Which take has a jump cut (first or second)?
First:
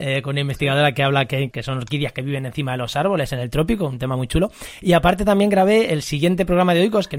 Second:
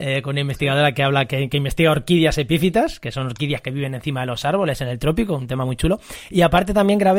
first